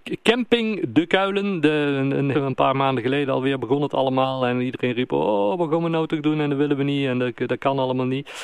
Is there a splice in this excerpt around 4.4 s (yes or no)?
no